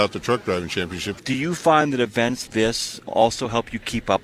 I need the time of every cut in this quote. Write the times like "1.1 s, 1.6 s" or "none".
1.2 s, 2.5 s